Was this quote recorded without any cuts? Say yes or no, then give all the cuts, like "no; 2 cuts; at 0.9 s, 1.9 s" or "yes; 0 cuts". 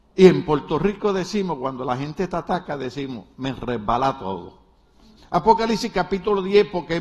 no; 1 cut; at 5.2 s